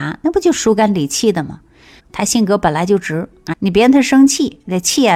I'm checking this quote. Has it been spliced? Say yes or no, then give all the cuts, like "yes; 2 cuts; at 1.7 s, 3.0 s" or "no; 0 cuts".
yes; 2 cuts; at 2.0 s, 3.5 s